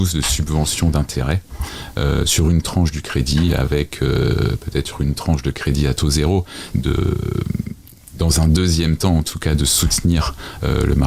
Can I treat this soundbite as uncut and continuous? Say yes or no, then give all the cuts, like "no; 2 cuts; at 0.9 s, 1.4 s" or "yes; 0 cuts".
no; 1 cut; at 6.7 s